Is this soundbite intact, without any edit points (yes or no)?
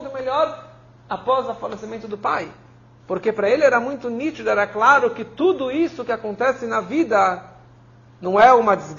yes